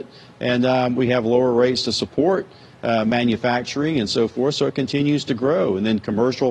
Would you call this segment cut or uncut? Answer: uncut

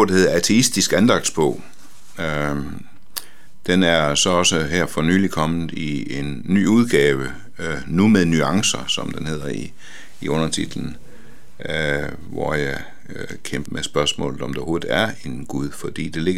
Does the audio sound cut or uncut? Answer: cut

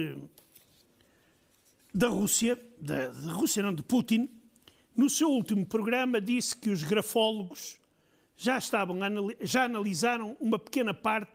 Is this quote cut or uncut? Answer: uncut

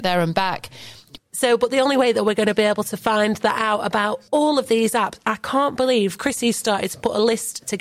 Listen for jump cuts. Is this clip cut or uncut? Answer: cut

